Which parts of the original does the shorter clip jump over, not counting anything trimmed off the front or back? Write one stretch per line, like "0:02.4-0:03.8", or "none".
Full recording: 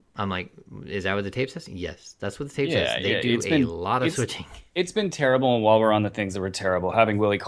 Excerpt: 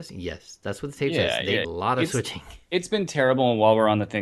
0:03.2-0:03.7

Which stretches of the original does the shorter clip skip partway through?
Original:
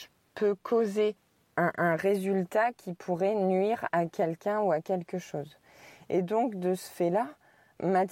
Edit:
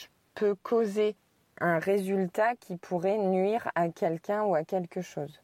0:01.6-0:01.7

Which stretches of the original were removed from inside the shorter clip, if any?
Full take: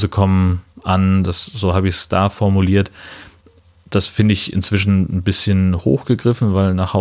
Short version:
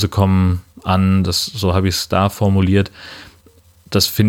none

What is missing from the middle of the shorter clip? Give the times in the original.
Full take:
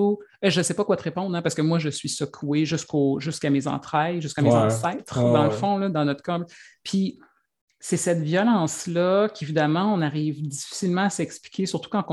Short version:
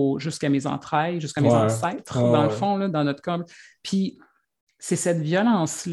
none

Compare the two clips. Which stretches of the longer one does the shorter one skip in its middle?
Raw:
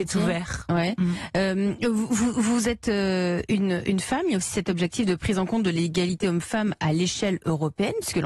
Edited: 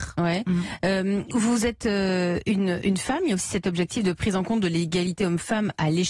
0:01.8-0:02.3

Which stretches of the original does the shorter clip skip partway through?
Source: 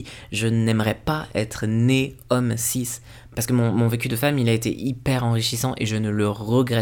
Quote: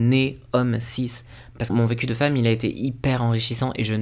0:03.5-0:03.7

